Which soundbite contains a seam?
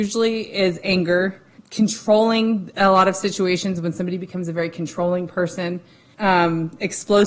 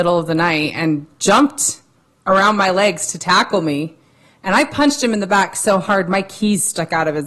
first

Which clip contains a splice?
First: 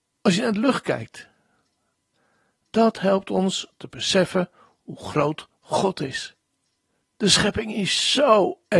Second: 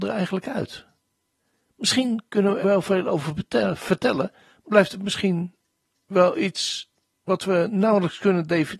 second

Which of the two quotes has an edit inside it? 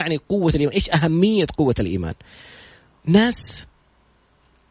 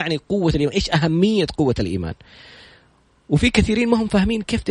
first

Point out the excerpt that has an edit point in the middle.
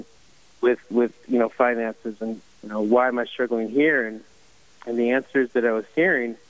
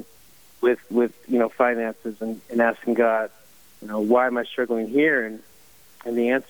first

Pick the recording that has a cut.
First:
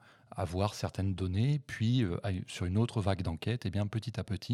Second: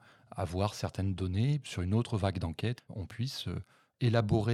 second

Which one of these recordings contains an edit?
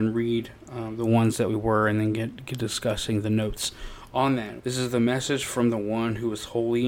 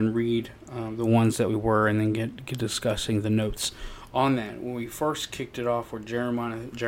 first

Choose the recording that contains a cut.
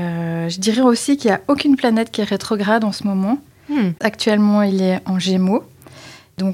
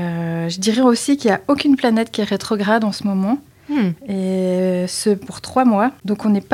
first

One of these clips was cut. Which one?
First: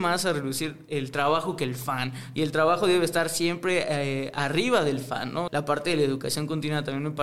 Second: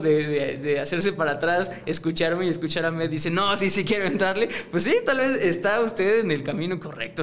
first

